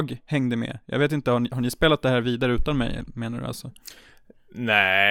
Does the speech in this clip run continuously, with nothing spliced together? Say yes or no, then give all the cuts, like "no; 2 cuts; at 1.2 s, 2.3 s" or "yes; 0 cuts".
yes; 0 cuts